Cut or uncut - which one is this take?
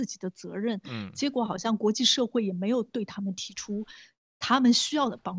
uncut